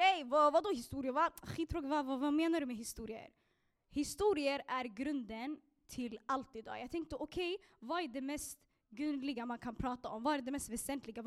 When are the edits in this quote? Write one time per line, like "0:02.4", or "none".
0:03.7